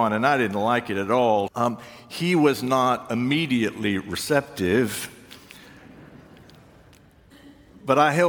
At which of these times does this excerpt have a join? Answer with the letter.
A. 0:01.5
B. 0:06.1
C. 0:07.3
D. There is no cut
A